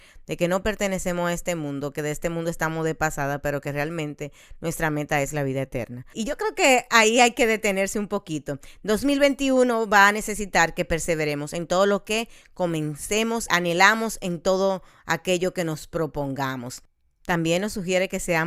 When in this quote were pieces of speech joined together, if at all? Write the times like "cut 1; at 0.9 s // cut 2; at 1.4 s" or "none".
cut 1; at 6.1 s // cut 2; at 13.5 s